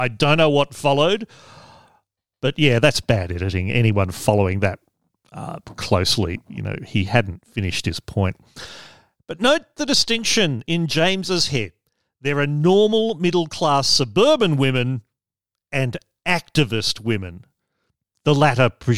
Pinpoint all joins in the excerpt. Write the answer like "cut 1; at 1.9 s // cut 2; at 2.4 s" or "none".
none